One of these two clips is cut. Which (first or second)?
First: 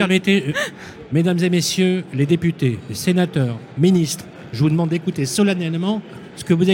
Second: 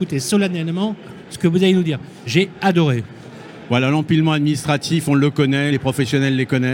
second